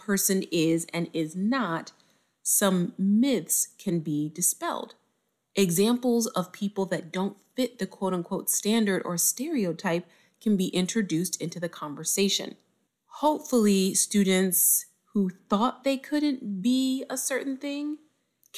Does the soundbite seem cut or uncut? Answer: uncut